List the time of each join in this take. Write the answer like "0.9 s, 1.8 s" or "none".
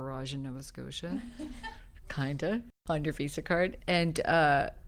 2.8 s